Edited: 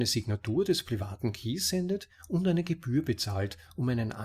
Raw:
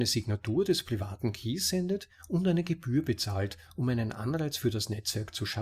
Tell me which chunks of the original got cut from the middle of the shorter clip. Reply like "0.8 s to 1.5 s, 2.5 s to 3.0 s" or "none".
none